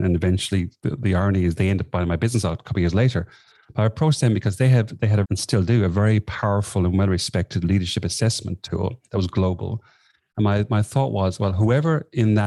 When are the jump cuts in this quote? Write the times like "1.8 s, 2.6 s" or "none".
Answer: 5.2 s